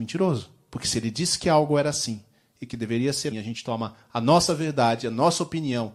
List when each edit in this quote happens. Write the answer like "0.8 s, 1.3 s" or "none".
3.3 s